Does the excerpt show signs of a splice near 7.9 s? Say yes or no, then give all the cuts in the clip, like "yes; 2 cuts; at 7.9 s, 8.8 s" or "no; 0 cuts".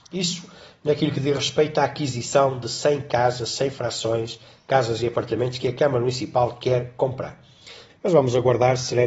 yes; 1 cut; at 7.9 s